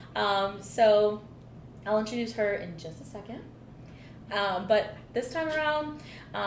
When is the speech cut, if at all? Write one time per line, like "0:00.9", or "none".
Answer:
0:04.3